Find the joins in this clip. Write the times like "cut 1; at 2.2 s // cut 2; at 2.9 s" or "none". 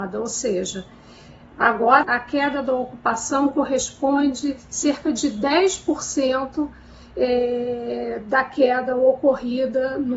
cut 1; at 2.0 s